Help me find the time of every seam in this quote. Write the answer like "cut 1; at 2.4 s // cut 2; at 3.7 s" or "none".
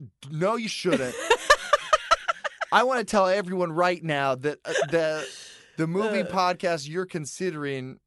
none